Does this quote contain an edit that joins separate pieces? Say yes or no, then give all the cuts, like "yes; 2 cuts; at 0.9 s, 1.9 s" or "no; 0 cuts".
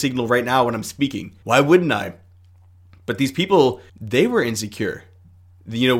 yes; 2 cuts; at 1.4 s, 3.9 s